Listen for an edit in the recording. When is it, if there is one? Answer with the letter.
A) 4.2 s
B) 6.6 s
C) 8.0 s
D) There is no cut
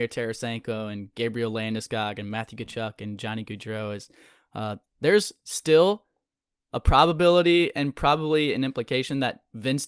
D